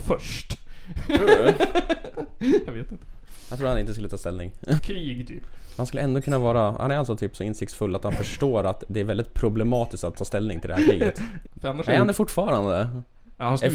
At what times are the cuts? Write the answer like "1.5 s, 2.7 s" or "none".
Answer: 4.8 s, 11.4 s